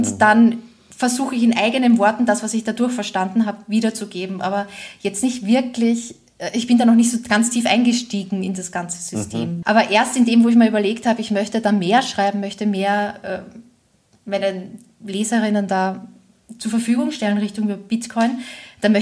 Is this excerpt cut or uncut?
cut